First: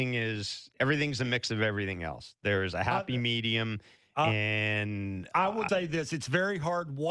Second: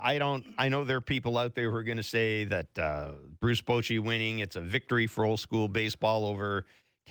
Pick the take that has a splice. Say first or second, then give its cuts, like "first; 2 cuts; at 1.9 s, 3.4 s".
first; 1 cut; at 5.7 s